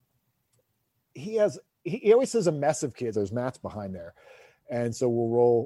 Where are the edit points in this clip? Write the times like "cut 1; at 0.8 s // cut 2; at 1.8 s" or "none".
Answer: cut 1; at 3.1 s